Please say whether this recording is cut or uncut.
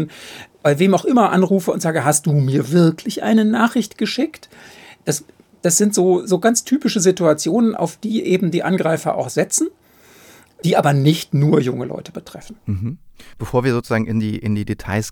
uncut